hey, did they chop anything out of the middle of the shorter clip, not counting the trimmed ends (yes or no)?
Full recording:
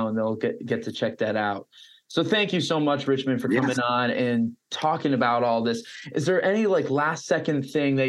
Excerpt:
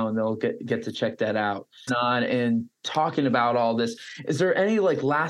yes